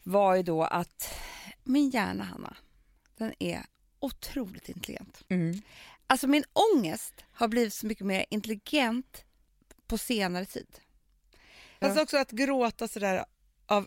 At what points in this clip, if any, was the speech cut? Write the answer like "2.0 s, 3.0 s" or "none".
5.3 s, 11.8 s